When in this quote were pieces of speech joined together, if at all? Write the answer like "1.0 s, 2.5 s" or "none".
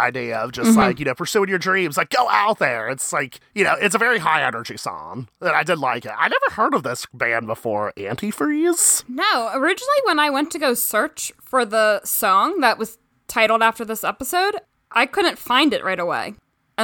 none